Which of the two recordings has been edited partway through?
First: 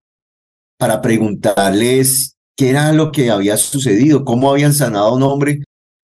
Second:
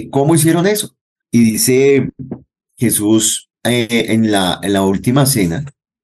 second; 2 cuts; at 1.2 s, 3.6 s

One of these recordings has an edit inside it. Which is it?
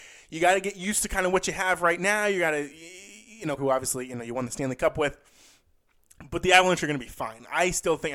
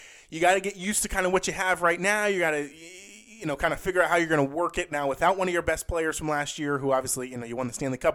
first; 1 cut; at 3.6 s

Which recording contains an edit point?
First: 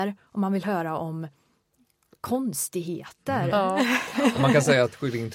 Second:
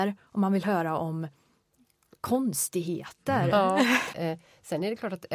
second; 1 cut; at 4.1 s

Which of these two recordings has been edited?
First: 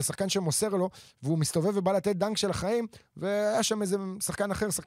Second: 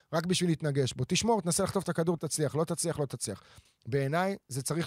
second; 2 cuts; at 2.2 s, 3.6 s

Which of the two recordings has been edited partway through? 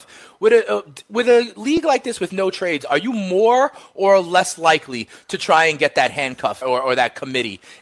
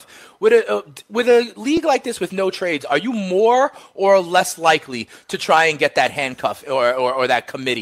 first; 1 cut; at 6.6 s

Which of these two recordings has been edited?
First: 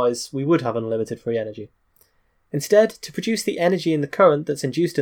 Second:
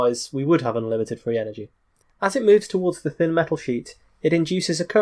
second; 1 cut; at 2.0 s

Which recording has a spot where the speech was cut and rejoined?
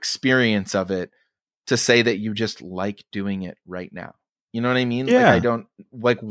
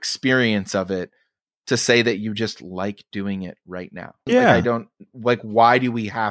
second; 1 cut; at 4.3 s

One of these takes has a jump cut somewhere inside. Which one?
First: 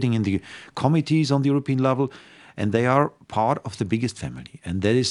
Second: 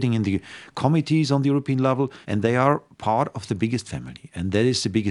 second; 1 cut; at 2.2 s

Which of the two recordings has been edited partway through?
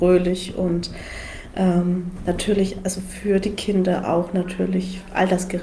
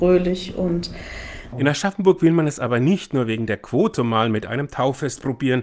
second; 1 cut; at 1.5 s

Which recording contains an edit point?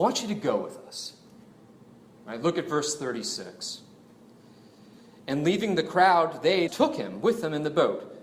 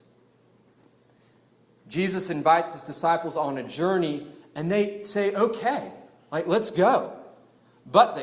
first; 1 cut; at 6.7 s

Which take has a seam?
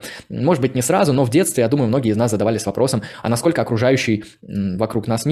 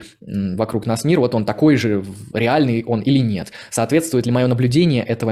second; 1 cut; at 2.3 s

